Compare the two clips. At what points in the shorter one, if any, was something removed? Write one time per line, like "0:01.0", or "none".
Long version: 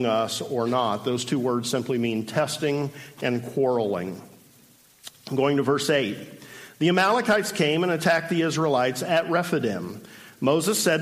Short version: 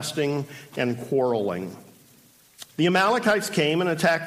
0:02.7